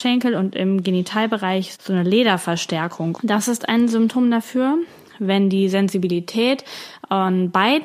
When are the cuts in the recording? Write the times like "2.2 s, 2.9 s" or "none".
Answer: 1.8 s, 3.2 s